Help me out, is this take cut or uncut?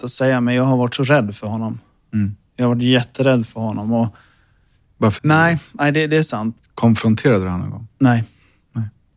cut